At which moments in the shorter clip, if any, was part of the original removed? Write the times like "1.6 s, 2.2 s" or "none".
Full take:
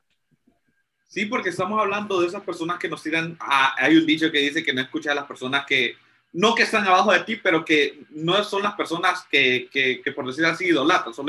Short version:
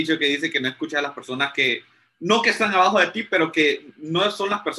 none